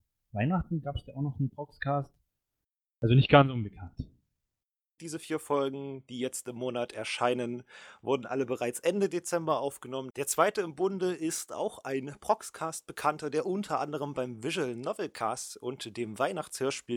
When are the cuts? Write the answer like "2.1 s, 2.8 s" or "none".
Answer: 5.0 s, 10.1 s